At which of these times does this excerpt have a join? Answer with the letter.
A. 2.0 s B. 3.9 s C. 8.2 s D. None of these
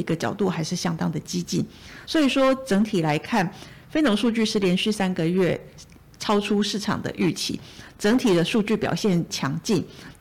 A